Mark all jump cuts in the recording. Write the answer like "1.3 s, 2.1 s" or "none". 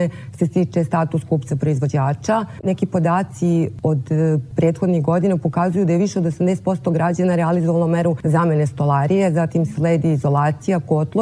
2.6 s